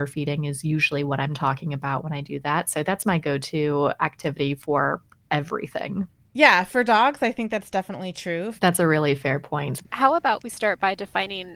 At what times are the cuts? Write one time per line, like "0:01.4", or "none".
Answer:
0:08.6
0:09.8